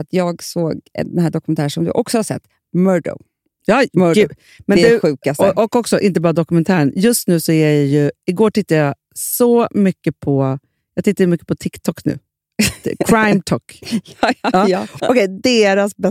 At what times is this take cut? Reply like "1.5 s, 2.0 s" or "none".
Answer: 15.0 s